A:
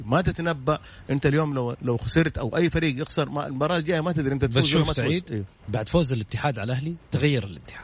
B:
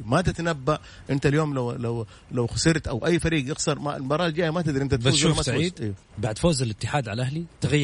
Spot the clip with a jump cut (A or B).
A